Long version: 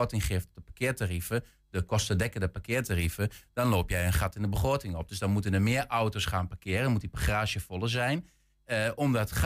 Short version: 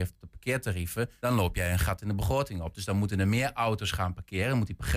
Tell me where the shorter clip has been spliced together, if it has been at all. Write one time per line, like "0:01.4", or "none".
0:01.2